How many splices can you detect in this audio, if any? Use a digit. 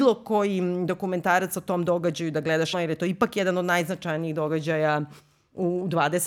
1